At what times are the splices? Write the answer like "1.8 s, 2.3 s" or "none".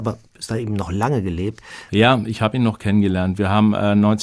1.9 s